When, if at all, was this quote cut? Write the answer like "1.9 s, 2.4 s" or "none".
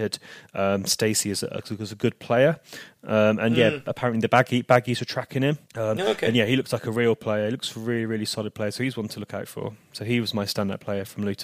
5.7 s